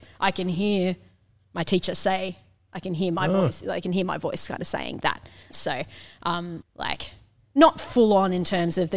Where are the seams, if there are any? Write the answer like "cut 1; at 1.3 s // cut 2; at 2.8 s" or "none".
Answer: cut 1; at 5.5 s // cut 2; at 6.6 s